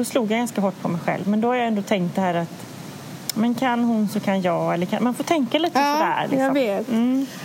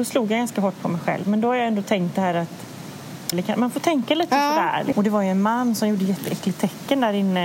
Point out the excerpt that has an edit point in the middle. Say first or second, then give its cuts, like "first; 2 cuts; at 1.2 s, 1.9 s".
second; 2 cuts; at 3.3 s, 4.9 s